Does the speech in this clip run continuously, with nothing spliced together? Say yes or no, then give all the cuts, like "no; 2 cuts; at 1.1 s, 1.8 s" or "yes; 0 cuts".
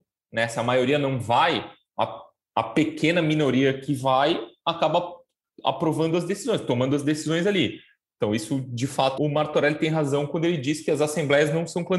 no; 1 cut; at 9.2 s